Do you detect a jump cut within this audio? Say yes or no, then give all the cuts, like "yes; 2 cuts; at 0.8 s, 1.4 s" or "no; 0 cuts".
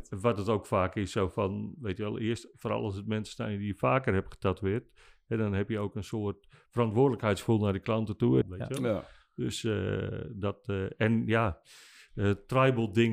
yes; 1 cut; at 8.4 s